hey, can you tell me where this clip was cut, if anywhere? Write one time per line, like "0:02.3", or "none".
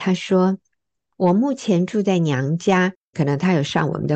0:03.1

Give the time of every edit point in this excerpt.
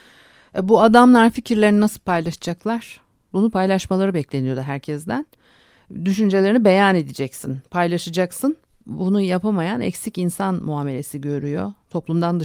0:03.3

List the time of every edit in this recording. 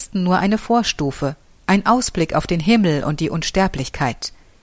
none

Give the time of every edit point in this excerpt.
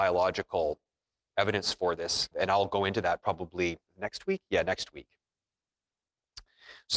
0:02.3
0:03.9

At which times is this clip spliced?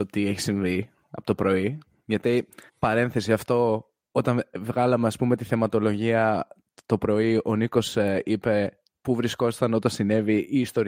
0:02.7

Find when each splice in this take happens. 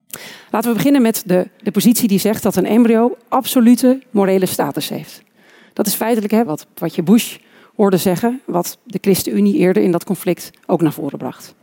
0:06.5

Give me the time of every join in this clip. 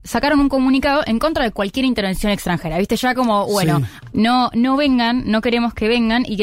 0:04.1

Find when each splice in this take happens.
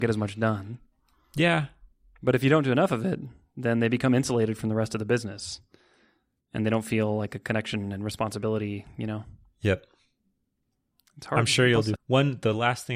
0:12.0

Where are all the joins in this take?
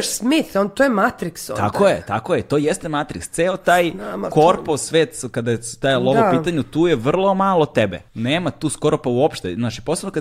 0:08.1

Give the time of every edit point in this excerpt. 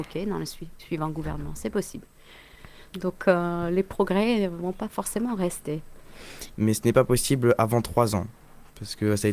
0:02.9
0:06.5

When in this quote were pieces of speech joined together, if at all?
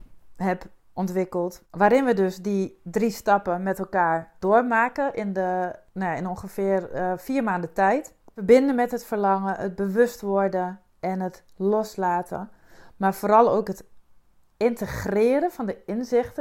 none

